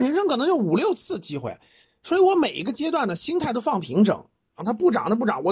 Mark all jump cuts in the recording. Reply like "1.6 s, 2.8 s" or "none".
4.6 s

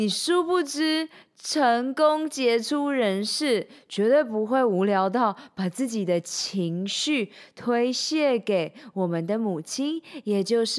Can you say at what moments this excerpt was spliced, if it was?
none

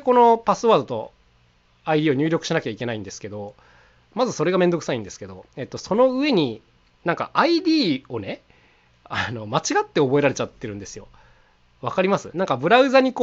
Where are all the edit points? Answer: none

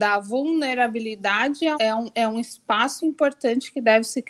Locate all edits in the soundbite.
1.7 s, 3.0 s

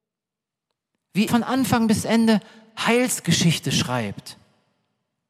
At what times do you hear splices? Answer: 1.3 s

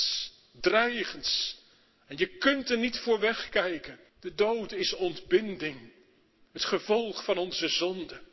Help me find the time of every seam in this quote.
4.1 s

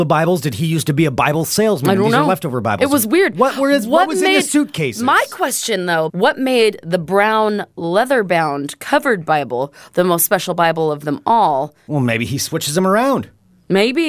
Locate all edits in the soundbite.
6.1 s, 11.9 s

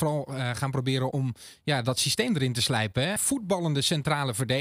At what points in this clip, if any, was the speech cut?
1.1 s, 3.2 s

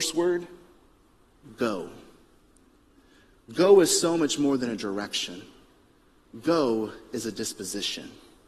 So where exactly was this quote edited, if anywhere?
none

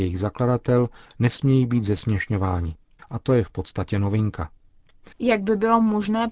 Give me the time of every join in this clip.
3.0 s, 5.1 s

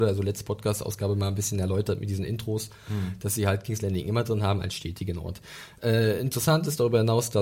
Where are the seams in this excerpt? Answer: none

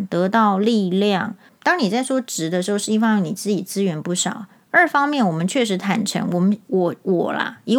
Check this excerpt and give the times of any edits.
1.5 s

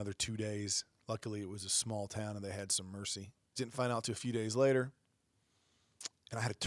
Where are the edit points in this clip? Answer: 3.6 s

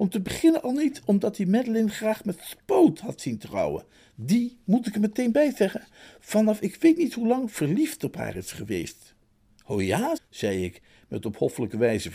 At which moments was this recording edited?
10.2 s

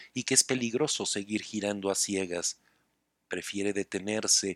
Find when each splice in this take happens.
none

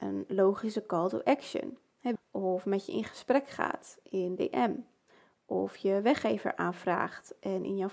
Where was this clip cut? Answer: 2.2 s

